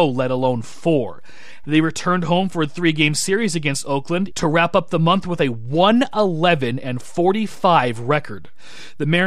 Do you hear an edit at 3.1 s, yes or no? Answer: no